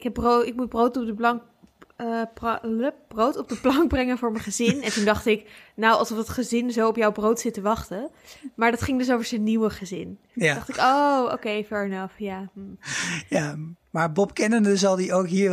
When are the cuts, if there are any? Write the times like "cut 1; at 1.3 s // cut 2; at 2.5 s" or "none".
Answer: none